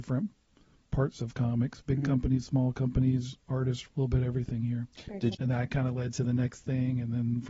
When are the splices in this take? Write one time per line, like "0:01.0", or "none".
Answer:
0:03.9
0:05.3

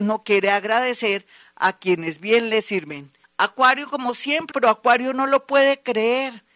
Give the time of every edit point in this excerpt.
0:03.2
0:04.5

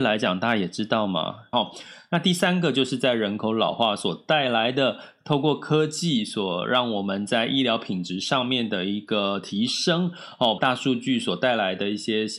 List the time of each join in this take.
0:01.5
0:10.6

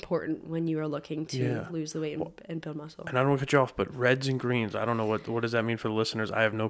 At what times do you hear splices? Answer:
none

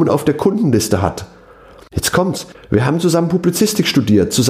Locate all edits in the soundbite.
0:02.5

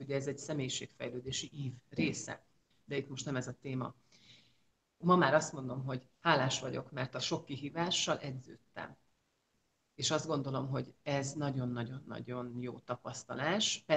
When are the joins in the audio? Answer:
0:05.0
0:06.1

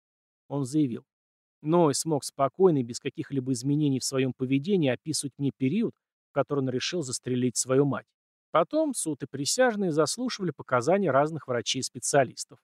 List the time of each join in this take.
0:08.4

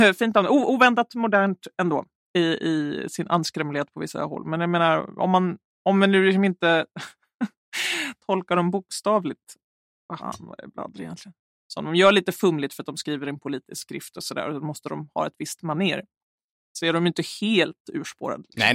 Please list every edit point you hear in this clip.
0:10.2
0:11.5

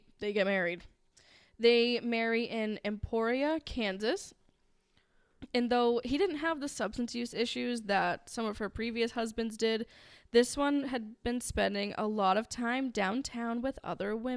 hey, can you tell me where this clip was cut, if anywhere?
none

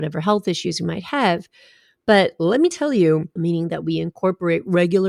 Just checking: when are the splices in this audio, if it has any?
0:03.4

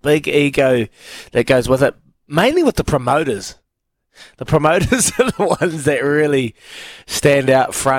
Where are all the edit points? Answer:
none

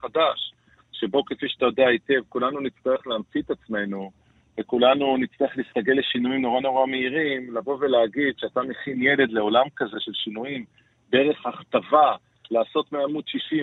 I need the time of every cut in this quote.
none

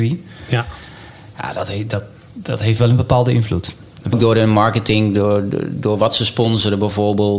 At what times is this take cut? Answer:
0:04.1

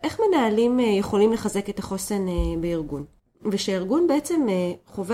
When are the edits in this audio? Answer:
0:03.3

